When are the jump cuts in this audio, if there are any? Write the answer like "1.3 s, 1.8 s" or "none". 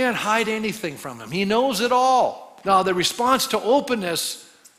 2.6 s